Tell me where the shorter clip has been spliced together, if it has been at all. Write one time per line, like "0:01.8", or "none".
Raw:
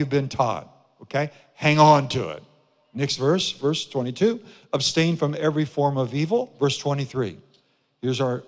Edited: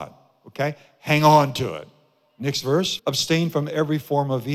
0:03.0